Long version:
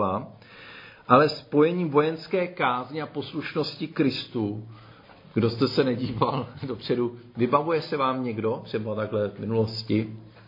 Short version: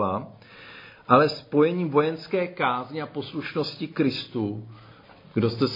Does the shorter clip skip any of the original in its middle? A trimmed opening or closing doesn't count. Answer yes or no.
no